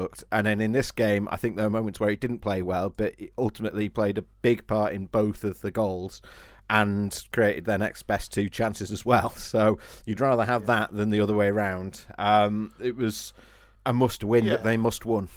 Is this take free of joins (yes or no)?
yes